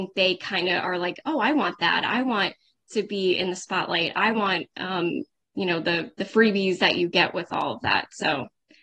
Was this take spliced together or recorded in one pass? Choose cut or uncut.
uncut